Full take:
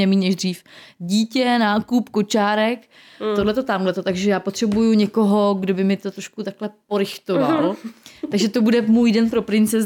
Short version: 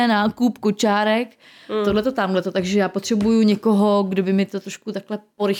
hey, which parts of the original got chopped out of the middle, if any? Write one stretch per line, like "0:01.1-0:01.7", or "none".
none

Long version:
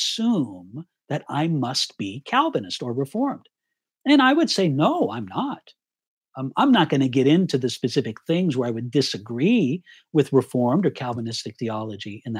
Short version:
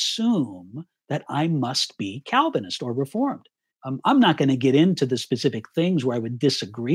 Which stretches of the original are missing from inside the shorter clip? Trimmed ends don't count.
0:03.7-0:06.2

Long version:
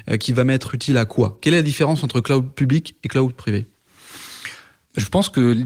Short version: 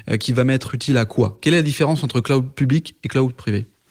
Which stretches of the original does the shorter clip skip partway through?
none

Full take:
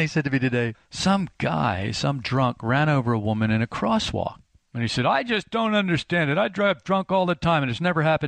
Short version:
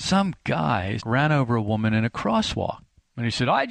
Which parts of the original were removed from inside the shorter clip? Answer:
0:01.9-0:02.6

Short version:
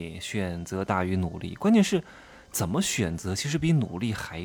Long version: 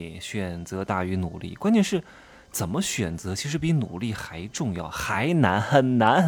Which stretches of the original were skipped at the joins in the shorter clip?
none

